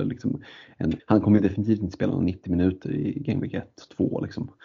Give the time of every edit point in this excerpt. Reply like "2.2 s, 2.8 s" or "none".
1.0 s

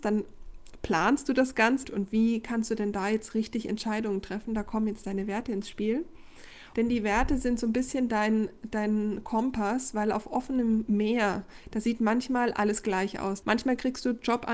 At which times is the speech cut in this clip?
1.8 s, 6.7 s, 13.4 s

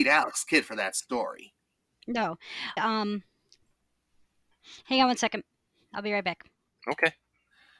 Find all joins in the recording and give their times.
2.8 s

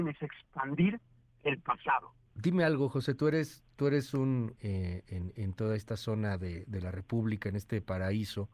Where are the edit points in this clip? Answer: 2.3 s, 4.6 s

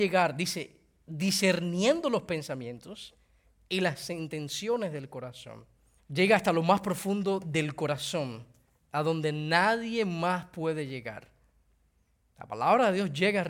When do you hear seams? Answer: 6.0 s

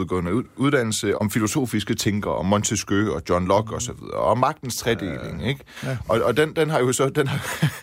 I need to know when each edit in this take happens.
1.1 s

